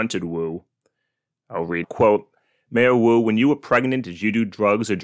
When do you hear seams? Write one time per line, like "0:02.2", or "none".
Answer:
0:01.8